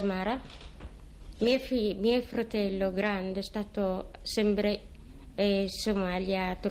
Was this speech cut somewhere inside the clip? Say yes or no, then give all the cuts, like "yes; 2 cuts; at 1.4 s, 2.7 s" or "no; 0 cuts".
no; 0 cuts